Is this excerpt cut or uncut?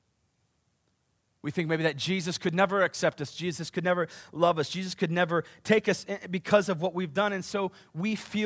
uncut